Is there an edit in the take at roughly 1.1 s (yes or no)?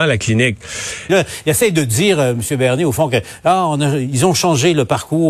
yes